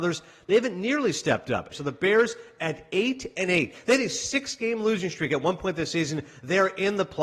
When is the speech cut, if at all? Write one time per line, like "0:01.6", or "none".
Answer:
0:01.7